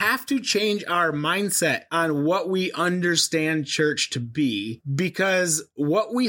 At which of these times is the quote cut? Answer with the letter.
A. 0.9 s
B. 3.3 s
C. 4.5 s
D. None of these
D